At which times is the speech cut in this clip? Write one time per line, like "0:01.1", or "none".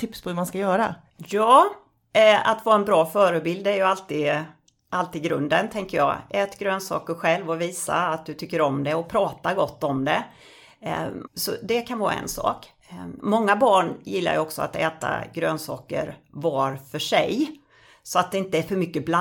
0:11.3
0:13.2